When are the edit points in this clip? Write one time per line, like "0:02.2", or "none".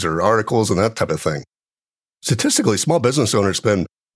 none

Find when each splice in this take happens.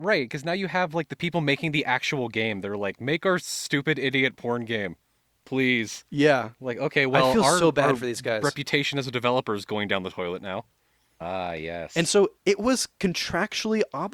0:11.2
0:12.4

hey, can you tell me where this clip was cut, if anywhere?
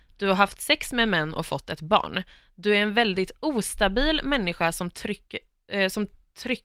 none

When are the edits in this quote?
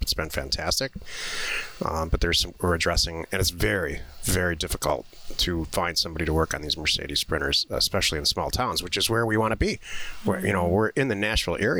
none

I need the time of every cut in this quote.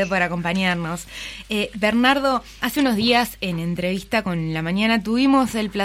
0:02.6

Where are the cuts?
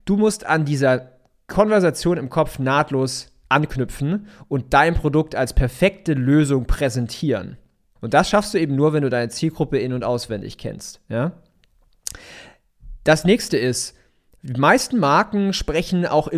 0:08.0

